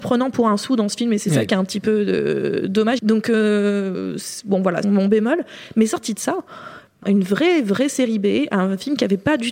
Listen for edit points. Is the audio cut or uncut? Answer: cut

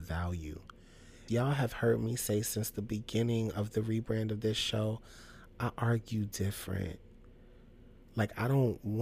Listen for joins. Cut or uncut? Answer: cut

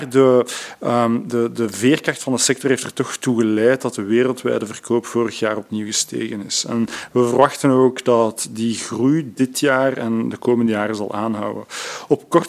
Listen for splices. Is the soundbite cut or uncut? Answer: uncut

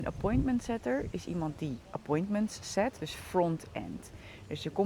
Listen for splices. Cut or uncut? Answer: cut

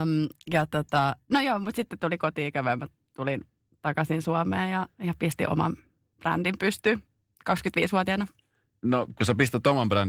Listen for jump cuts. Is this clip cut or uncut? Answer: uncut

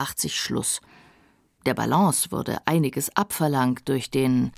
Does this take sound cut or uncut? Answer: cut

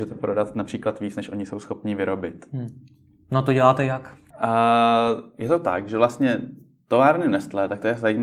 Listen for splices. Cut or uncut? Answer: cut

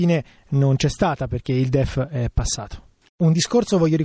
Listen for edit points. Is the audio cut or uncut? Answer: cut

